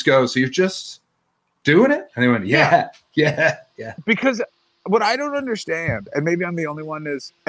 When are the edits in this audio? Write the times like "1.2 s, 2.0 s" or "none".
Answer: none